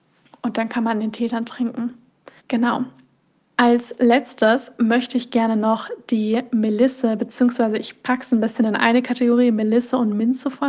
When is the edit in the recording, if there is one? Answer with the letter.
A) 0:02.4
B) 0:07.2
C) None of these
A